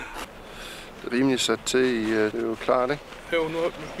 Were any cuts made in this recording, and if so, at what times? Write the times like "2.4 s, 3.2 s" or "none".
1.1 s, 2.3 s